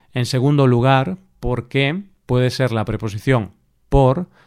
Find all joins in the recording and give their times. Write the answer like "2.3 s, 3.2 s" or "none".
none